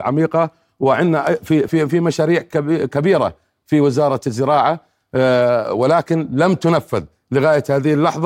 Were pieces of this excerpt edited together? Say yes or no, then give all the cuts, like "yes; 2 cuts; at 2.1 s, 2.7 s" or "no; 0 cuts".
yes; 1 cut; at 1.7 s